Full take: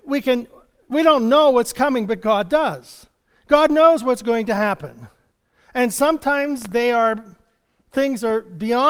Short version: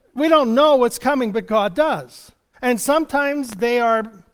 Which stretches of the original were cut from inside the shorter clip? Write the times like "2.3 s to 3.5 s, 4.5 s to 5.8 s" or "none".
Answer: 3.3 s to 5.7 s